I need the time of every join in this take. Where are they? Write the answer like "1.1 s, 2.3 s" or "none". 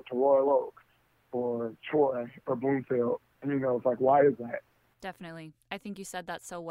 4.9 s